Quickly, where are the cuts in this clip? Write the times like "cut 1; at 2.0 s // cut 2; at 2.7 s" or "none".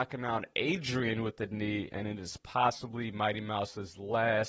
cut 1; at 1.9 s